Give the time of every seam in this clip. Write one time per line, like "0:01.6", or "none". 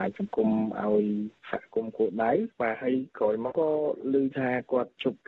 0:03.5